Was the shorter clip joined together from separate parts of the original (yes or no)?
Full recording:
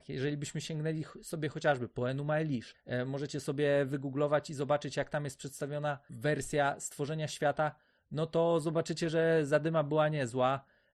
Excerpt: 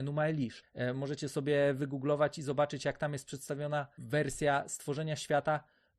no